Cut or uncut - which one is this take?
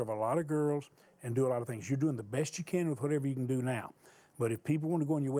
uncut